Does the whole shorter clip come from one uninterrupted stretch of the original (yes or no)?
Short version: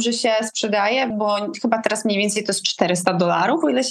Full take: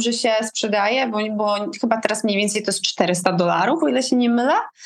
no